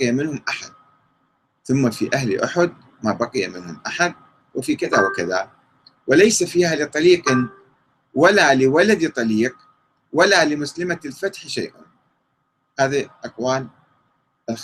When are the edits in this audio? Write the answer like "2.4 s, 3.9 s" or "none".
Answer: none